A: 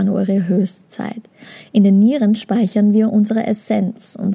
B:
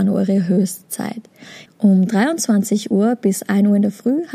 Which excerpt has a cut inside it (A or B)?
B